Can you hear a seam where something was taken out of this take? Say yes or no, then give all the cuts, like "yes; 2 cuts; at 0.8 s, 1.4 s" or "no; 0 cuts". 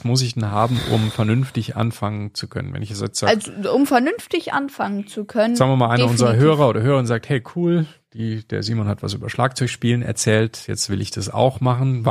no; 0 cuts